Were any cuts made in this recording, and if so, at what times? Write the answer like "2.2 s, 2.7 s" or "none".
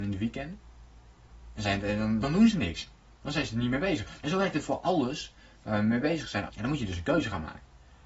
2.2 s, 4.2 s, 6.5 s

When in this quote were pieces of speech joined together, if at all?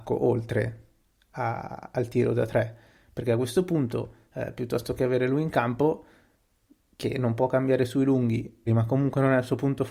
8.7 s

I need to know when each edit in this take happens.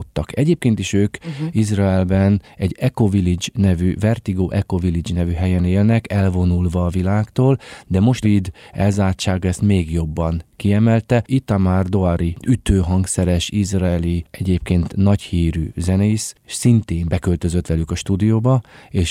8.2 s

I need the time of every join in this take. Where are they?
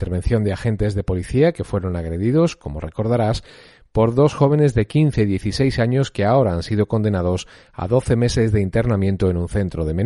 none

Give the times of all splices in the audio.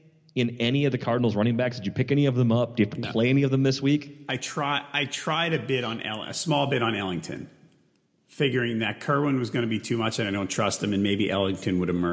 none

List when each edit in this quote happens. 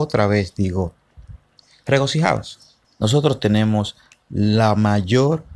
2.8 s

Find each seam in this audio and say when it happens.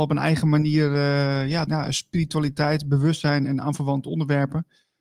1.7 s

